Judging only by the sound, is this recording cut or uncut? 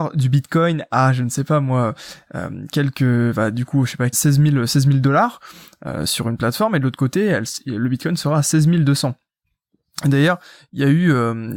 cut